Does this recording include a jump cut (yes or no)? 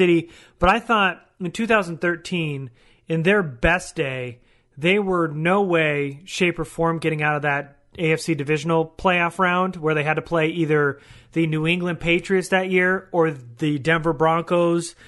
no